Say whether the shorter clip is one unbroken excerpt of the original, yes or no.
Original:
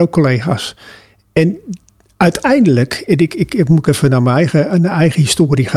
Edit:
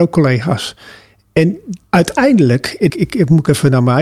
no